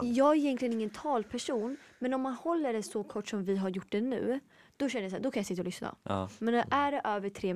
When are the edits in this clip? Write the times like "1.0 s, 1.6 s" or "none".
none

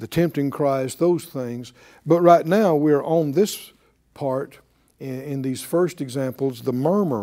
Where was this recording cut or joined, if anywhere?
none

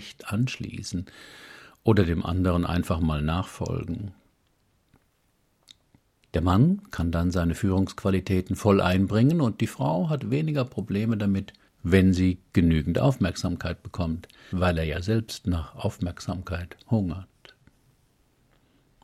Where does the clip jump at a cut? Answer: 6.2 s, 11.7 s, 14.5 s

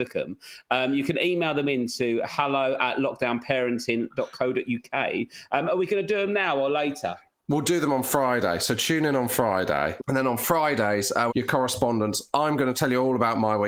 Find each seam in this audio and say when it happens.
10.0 s, 11.3 s

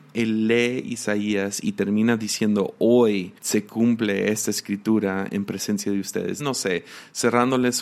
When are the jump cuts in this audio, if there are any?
3.4 s, 6.4 s

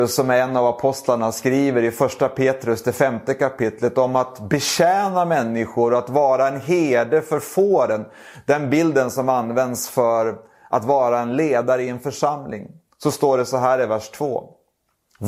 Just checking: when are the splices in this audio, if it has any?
none

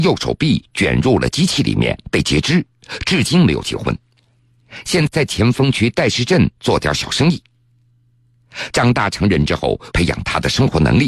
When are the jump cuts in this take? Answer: 5.1 s, 8.7 s, 9.9 s

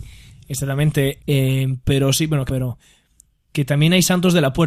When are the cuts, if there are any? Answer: 1.2 s, 2.5 s

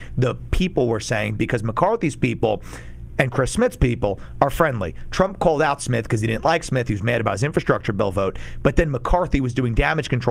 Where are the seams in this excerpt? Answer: none

